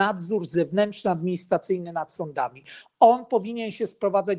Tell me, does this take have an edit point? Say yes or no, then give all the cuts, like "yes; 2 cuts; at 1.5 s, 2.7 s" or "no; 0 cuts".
no; 0 cuts